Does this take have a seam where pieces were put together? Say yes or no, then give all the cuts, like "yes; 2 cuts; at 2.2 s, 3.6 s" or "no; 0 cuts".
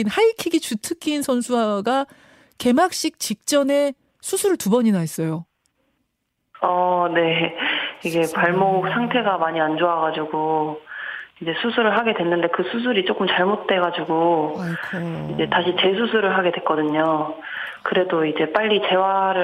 no; 0 cuts